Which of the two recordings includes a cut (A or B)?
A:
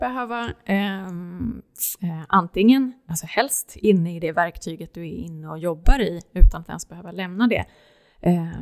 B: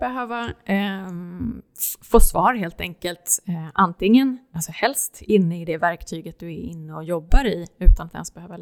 A